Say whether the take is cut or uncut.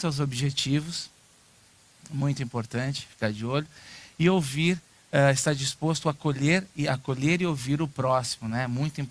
uncut